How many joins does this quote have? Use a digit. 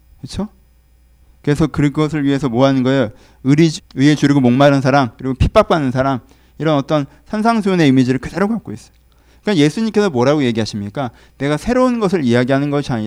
1